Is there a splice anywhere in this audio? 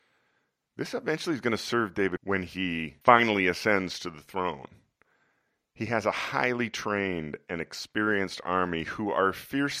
yes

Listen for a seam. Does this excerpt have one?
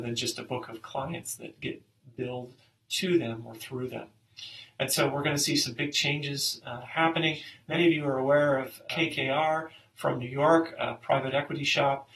no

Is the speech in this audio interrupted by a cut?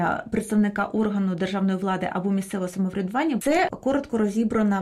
yes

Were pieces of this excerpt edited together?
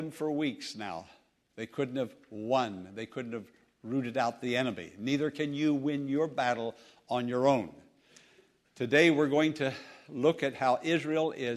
yes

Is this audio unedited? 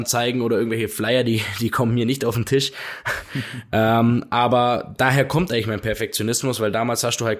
yes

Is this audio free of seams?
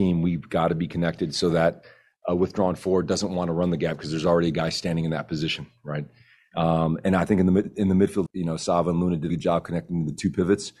no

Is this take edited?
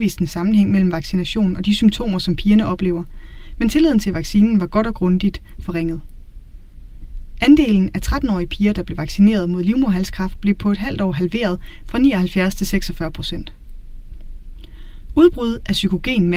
no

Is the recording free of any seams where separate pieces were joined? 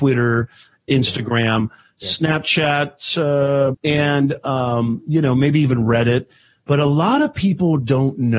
no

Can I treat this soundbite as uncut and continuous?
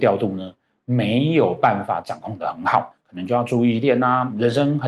no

